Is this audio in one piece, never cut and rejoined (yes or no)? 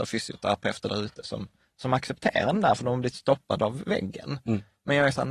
yes